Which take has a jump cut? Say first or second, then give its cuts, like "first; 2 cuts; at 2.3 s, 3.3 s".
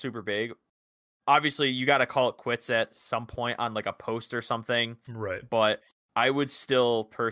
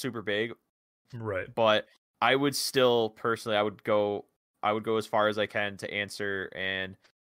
second; 1 cut; at 1.1 s